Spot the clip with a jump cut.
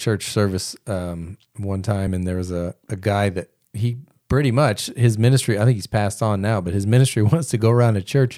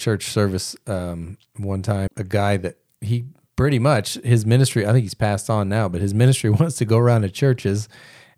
second; 1 cut; at 2.1 s

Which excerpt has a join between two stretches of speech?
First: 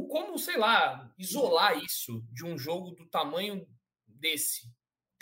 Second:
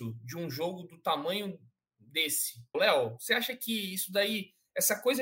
second; 1 cut; at 2.7 s

